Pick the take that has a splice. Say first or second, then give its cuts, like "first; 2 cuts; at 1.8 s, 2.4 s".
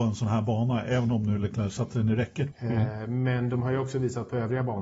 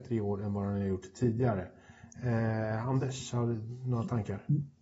first; 1 cut; at 2.5 s